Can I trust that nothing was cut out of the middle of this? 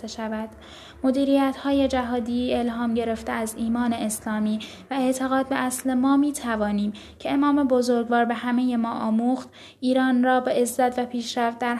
yes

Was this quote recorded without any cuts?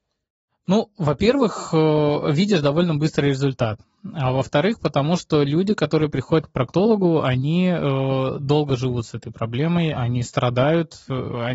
yes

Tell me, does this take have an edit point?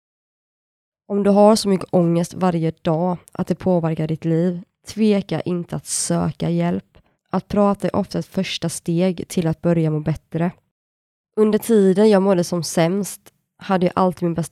yes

